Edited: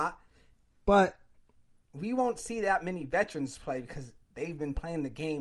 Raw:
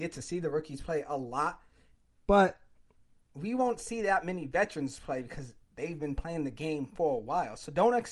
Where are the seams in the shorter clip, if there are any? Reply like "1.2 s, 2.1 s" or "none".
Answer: none